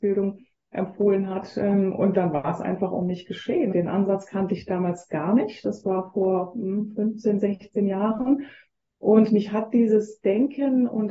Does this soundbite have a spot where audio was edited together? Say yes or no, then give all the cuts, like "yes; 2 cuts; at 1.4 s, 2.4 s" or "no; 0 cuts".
yes; 1 cut; at 3.7 s